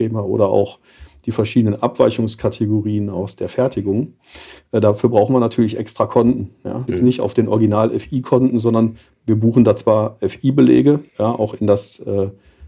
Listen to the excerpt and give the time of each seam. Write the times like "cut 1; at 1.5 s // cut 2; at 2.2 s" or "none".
cut 1; at 6.9 s // cut 2; at 11.1 s